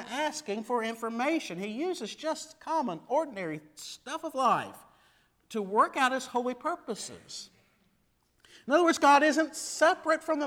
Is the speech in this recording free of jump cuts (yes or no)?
yes